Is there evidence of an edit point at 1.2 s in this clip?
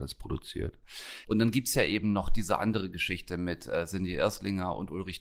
yes; 1 cut; at 1.2 s

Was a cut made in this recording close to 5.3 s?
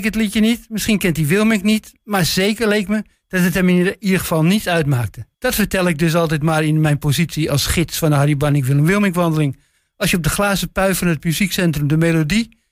yes; 1 cut; at 5.3 s

